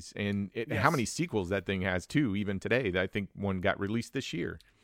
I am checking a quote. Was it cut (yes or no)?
no